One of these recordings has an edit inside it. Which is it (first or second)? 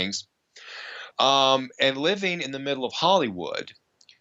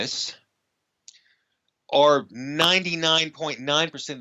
first